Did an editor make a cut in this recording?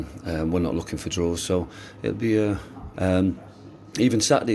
yes; 1 cut; at 2.9 s

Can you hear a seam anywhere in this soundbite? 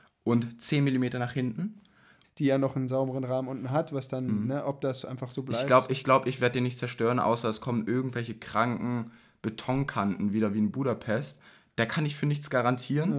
yes; 1 cut; at 2.2 s

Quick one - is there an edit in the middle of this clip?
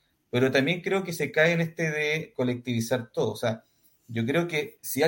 no; 0 cuts

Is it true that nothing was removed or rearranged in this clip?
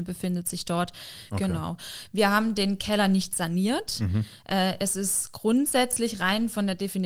no; 1 cut; at 1.3 s

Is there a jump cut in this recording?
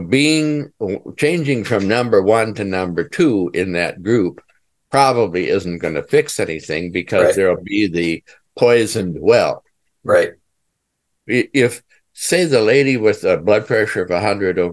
yes; 1 cut; at 11.1 s

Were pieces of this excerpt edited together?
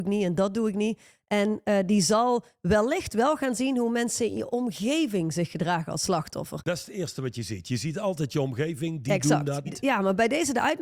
yes; 1 cut; at 9.6 s

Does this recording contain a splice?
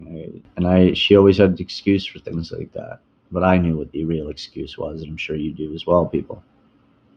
no; 0 cuts

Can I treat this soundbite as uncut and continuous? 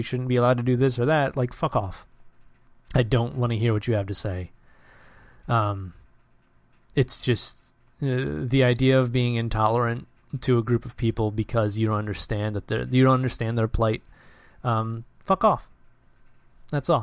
yes; 0 cuts

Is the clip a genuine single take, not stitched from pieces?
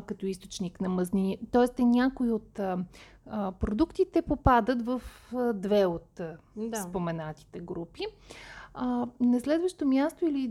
yes; 0 cuts

